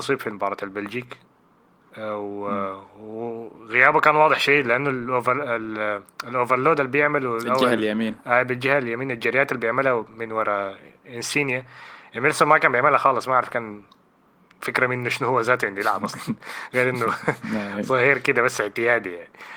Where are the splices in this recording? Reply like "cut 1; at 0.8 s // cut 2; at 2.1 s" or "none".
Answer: none